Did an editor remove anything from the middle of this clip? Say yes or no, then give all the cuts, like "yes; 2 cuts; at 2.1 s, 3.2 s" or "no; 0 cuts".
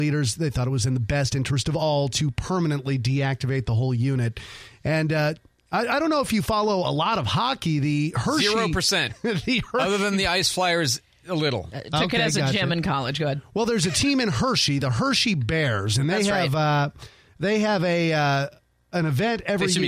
no; 0 cuts